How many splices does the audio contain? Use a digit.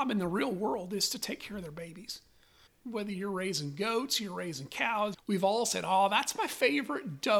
2